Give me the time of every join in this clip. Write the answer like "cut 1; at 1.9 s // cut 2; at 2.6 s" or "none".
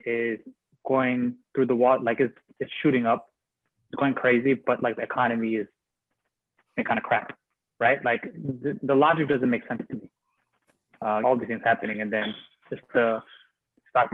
cut 1; at 8.7 s // cut 2; at 11.2 s // cut 3; at 12.9 s